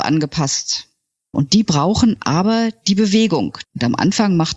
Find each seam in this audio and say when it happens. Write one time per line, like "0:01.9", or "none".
0:01.3
0:03.6